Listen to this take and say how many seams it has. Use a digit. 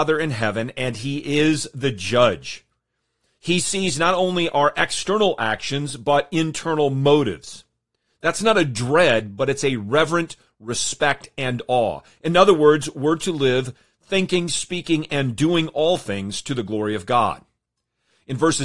1